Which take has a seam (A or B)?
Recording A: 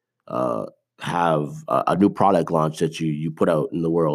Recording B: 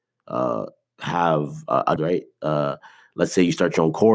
B